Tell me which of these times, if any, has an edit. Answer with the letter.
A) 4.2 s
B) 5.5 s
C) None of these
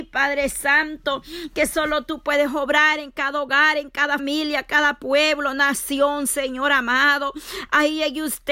A